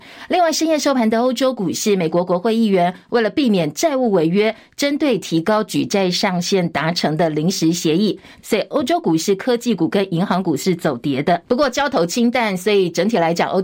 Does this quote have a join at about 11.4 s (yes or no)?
no